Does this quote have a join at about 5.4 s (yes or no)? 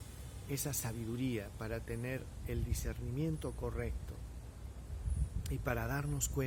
no